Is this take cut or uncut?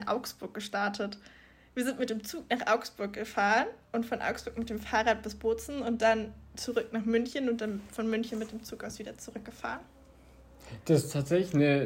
uncut